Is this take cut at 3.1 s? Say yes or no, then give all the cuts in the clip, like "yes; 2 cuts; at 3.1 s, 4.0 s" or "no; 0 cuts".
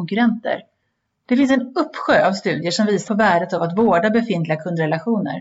yes; 2 cuts; at 1.1 s, 3.1 s